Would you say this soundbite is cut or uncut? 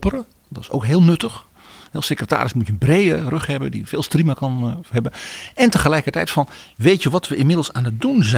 uncut